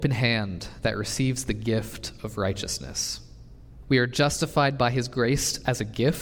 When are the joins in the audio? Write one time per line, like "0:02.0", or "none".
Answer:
0:03.8